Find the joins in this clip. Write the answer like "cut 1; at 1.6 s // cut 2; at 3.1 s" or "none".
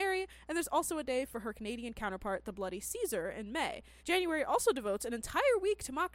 cut 1; at 4.0 s